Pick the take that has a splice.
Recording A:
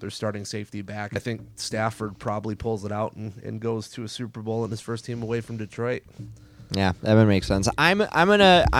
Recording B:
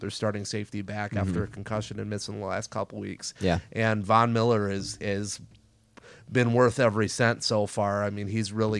A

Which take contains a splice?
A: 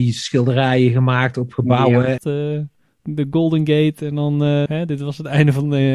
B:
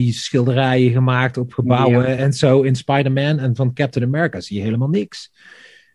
A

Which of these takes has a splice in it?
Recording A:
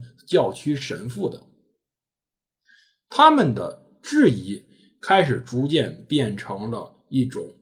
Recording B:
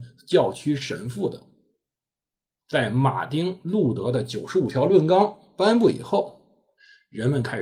B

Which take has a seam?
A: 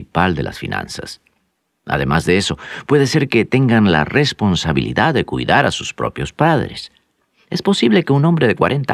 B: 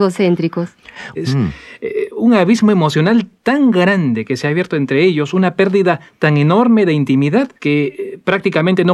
B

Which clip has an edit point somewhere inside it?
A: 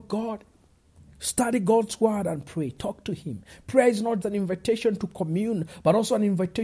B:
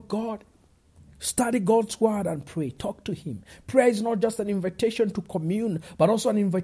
A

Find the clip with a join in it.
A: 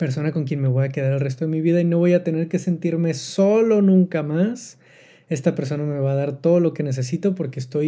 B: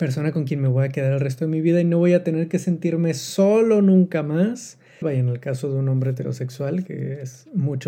B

